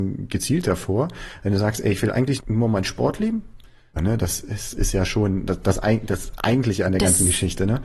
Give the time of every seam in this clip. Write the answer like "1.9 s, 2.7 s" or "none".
2.4 s, 4.0 s